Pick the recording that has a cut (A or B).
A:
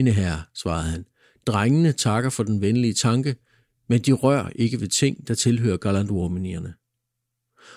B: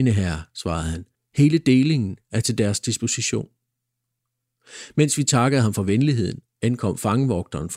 B